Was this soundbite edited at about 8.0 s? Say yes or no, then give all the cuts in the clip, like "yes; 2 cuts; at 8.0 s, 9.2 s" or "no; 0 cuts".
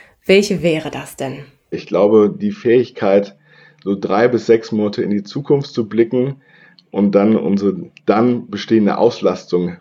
yes; 2 cuts; at 1.7 s, 8.0 s